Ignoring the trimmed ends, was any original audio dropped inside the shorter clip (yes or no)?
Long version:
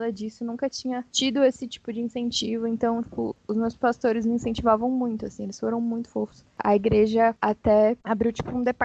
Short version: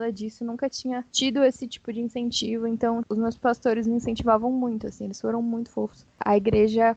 yes